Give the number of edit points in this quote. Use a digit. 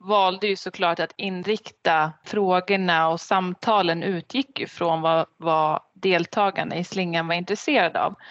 0